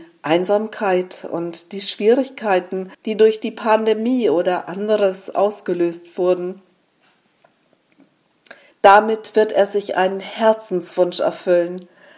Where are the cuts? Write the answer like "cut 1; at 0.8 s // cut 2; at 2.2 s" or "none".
cut 1; at 2.9 s // cut 2; at 8.7 s